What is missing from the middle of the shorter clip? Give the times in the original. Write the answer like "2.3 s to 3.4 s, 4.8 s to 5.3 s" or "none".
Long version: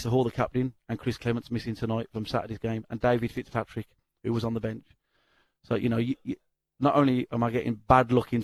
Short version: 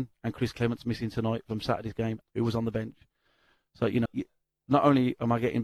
2.9 s to 4.1 s, 5.9 s to 6.2 s